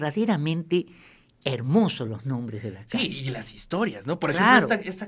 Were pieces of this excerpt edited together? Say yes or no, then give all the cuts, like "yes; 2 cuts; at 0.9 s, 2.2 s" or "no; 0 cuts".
no; 0 cuts